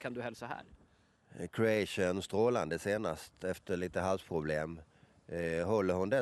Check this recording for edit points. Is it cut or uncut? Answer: uncut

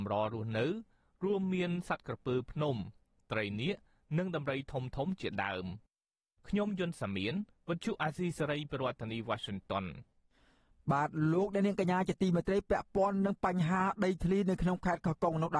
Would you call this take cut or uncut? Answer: uncut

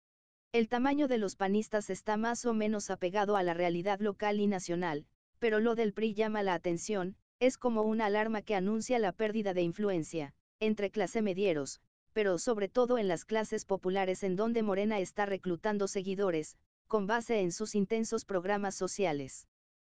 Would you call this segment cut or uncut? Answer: uncut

